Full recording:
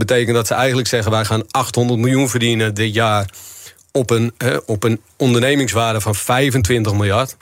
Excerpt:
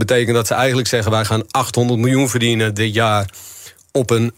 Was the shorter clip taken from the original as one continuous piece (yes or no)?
yes